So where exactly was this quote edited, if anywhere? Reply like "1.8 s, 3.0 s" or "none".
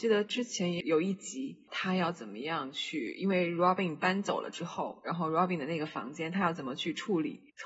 none